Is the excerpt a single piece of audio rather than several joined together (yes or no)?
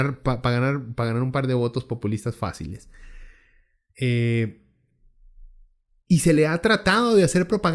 no